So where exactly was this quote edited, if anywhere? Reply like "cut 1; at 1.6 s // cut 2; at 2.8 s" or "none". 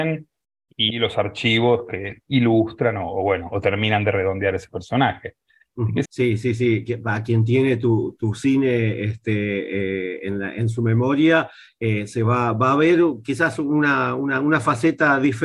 cut 1; at 6.1 s